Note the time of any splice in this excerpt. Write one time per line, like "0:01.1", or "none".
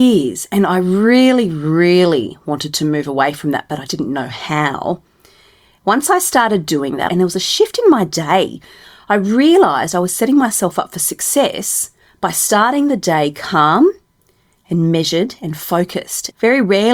0:03.9
0:05.8
0:07.1